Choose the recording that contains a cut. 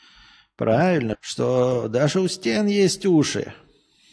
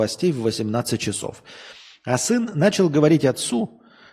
first; 1 cut; at 1.1 s

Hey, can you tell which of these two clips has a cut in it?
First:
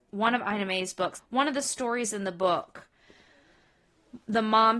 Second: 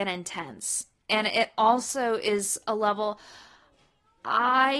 first; 1 cut; at 1.2 s

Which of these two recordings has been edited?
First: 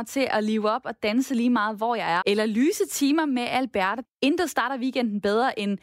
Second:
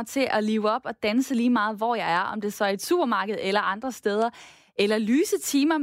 first; 2 cuts; at 2.2 s, 4.0 s

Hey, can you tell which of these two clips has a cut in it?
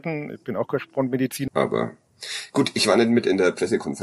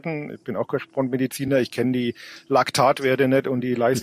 first; 1 cut; at 1.5 s

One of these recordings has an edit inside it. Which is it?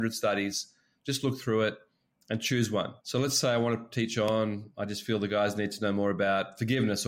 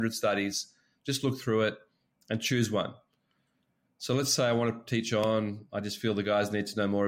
first; 1 cut; at 3.0 s

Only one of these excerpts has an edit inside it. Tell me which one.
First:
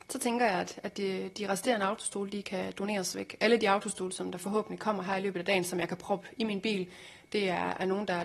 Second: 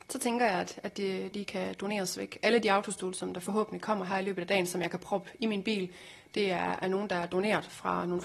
second; 1 cut; at 1.3 s

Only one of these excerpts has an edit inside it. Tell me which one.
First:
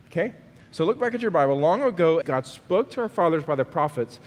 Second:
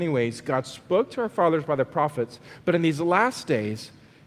first; 1 cut; at 2.2 s

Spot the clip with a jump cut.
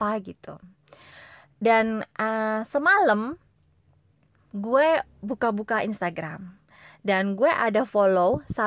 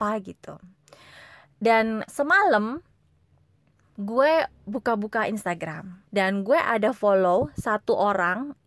second; 2 cuts; at 2.1 s, 6.1 s

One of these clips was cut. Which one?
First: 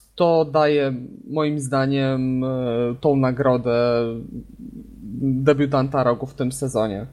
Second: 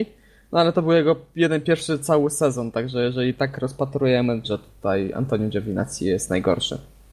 second; 2 cuts; at 1.6 s, 4.4 s

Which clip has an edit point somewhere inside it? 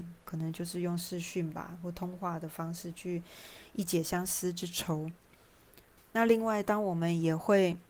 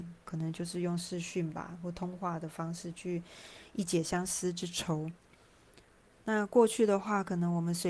first; 1 cut; at 6.0 s

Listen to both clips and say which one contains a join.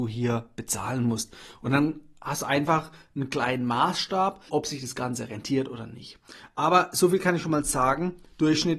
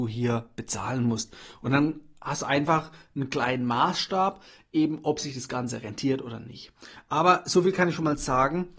first; 1 cut; at 4.5 s

